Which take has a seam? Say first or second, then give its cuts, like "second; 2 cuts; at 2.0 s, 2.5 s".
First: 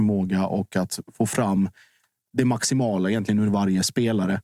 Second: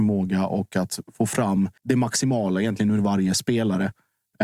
second; 1 cut; at 1.8 s